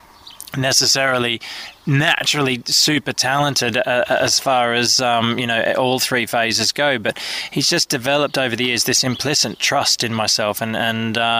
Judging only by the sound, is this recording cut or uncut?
uncut